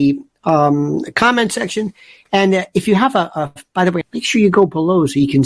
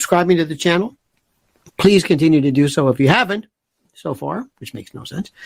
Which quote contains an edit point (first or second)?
first